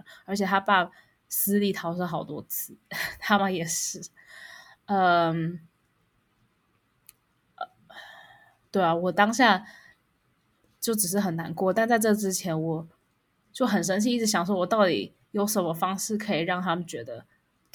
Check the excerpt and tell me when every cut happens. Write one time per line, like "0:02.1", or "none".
0:03.4